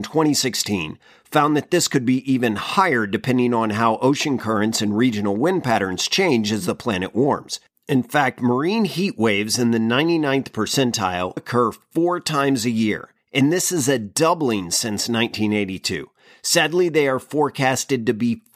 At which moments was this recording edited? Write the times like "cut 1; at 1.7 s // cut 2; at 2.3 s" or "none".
cut 1; at 11.4 s